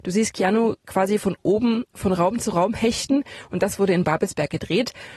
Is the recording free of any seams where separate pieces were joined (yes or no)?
yes